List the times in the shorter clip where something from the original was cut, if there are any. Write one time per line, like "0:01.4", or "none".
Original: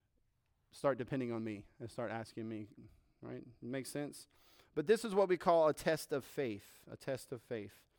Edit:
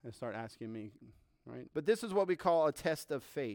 0:01.7